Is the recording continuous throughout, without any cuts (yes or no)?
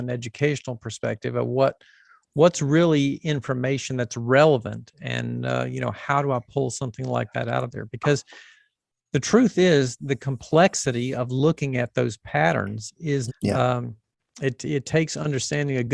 no